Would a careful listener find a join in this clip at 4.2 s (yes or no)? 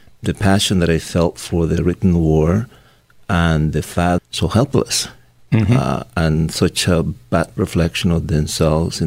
yes